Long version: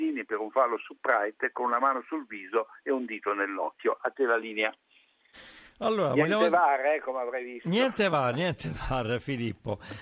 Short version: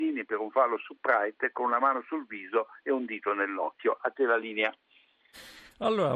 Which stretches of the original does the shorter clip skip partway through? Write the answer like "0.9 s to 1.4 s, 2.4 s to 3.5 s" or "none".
none

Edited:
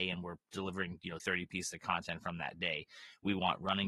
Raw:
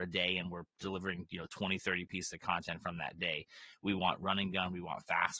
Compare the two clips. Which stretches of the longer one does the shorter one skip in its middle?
1.5 s to 1.8 s

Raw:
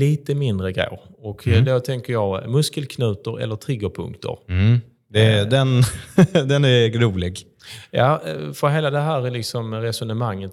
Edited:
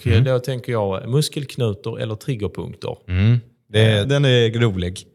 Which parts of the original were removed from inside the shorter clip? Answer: 5.5 s to 6.4 s

